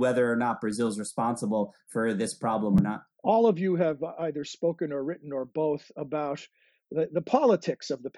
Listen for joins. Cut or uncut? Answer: cut